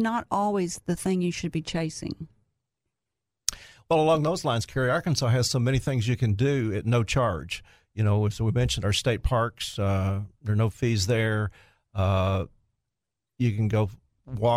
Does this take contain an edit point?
no; 0 cuts

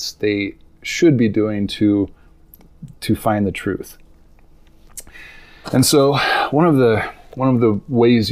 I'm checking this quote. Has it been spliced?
yes; 1 cut; at 5.6 s

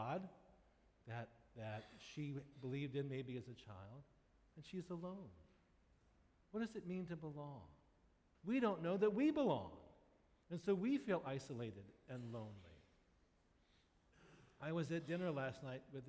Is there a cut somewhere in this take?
yes; 1 cut; at 8.3 s

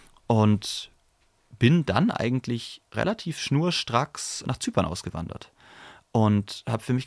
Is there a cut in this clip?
yes; 1 cut; at 4.4 s

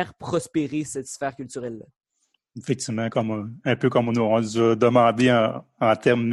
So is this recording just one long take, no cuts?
yes; 0 cuts

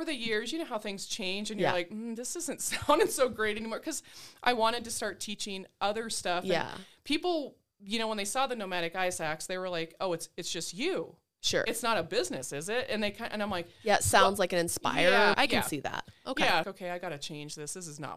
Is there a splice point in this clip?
yes; 2 cuts; at 15.3 s, 16.6 s

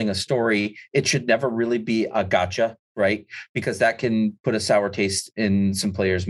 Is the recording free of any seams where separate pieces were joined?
no; 1 cut; at 2.8 s

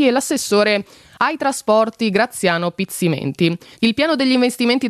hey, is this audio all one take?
no; 1 cut; at 3.7 s

